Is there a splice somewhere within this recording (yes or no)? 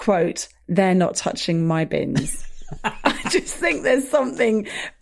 no